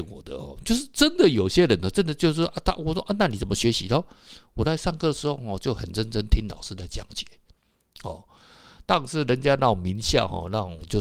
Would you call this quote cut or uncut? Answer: uncut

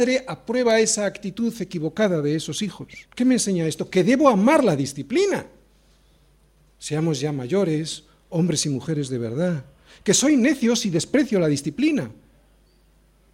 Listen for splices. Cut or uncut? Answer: cut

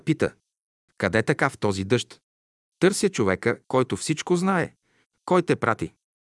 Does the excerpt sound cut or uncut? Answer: uncut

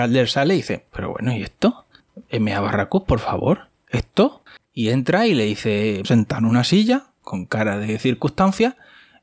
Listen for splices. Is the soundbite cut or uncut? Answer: cut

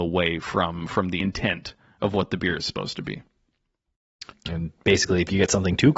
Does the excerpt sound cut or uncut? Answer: cut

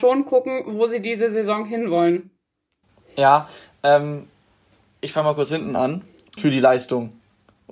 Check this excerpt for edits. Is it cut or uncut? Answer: cut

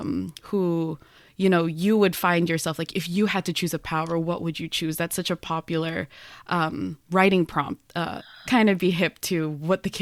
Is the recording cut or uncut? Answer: cut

